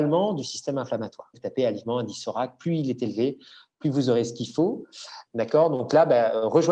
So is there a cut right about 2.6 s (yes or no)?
no